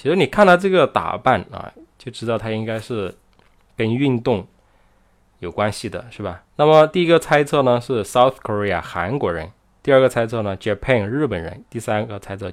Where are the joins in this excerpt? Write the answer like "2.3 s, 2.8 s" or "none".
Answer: 6.5 s